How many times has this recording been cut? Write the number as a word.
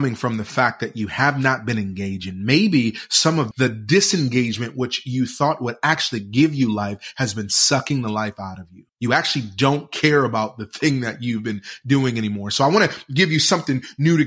two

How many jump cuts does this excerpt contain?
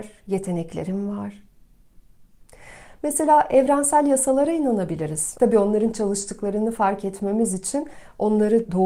one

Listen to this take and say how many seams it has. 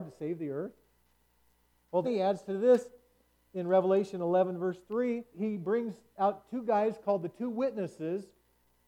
two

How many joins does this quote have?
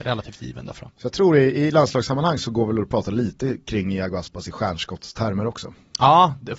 zero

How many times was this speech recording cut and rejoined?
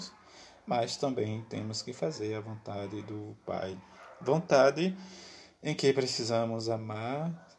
zero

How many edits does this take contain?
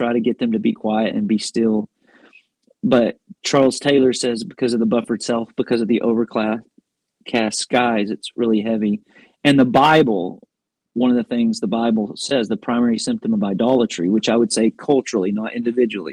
zero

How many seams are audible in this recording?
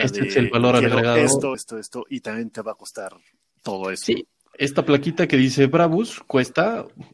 one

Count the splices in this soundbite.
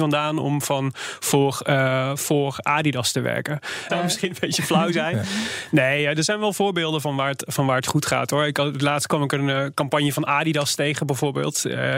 one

